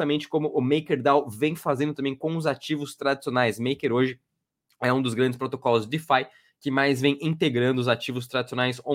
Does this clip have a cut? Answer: no; 0 cuts

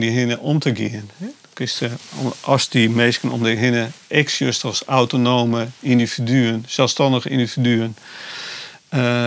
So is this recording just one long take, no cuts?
yes; 0 cuts

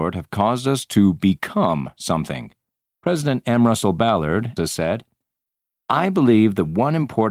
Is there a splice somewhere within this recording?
yes; 2 cuts; at 2.9 s, 4.6 s

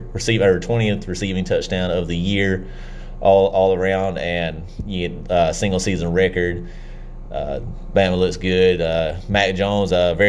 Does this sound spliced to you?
no; 0 cuts

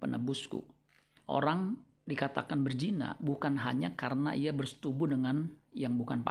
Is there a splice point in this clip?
yes; 1 cut; at 1.2 s

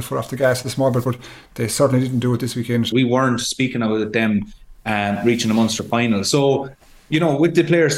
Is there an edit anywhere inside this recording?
yes; 1 cut; at 2.9 s

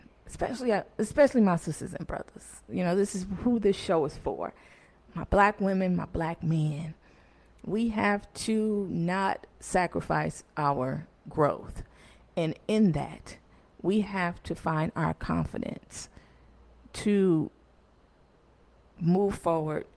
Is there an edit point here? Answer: yes; 1 cut; at 9.5 s

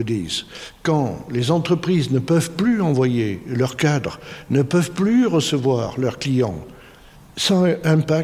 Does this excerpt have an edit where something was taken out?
no; 0 cuts

